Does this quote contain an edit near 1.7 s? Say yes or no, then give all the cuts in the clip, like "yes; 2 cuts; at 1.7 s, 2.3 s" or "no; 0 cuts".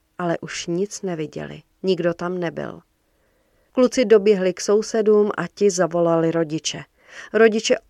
yes; 2 cuts; at 1.7 s, 3.7 s